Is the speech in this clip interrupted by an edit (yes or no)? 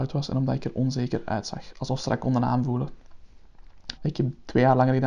yes